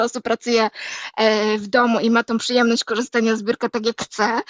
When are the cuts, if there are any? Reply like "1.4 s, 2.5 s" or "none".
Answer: none